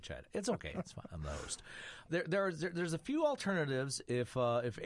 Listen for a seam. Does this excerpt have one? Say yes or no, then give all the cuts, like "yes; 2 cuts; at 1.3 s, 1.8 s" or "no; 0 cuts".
yes; 1 cut; at 2.1 s